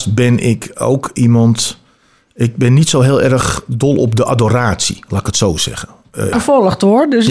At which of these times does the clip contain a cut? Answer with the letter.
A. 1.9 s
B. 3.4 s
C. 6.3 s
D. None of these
C